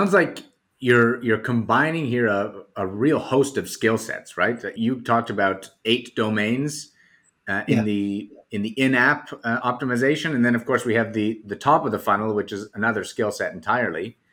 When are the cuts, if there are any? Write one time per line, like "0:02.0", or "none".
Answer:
0:04.8